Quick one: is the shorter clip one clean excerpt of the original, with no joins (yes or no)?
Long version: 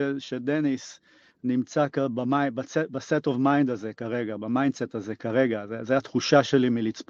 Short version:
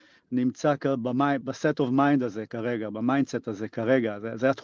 no